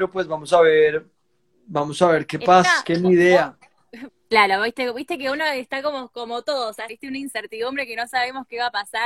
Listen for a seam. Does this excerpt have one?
yes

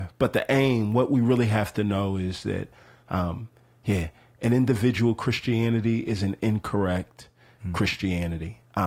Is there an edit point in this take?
no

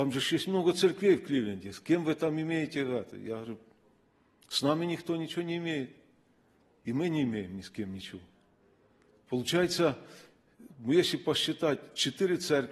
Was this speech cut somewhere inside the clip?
no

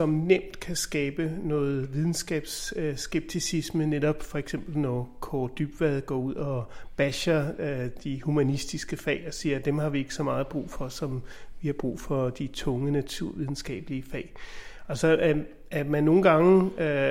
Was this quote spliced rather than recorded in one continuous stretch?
no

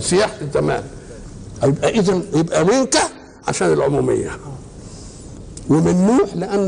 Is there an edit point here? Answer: yes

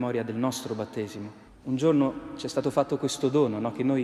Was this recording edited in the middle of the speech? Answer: yes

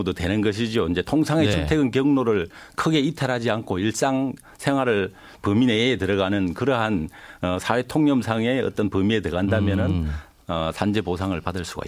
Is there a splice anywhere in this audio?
no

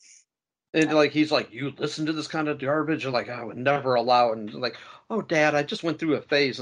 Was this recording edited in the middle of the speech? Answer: no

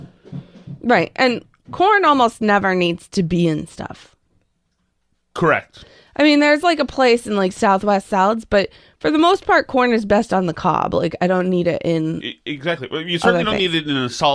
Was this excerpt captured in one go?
yes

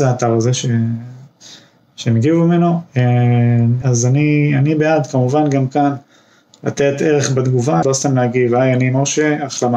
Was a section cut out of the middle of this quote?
yes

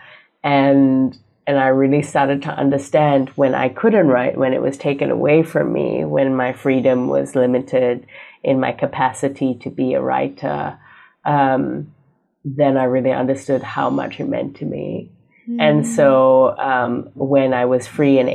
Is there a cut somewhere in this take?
no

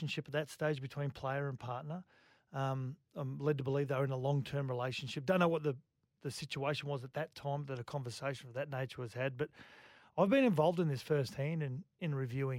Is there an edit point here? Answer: no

